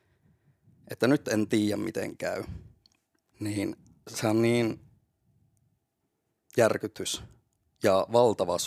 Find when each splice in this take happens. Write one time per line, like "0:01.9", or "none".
none